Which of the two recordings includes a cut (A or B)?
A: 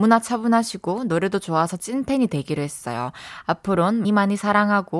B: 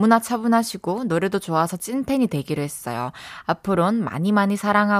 A